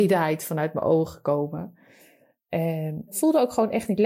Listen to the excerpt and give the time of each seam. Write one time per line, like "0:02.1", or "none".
0:03.1